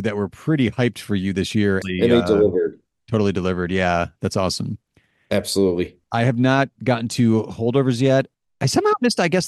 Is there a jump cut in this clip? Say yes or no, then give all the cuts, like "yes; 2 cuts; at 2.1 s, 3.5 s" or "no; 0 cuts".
yes; 1 cut; at 1.8 s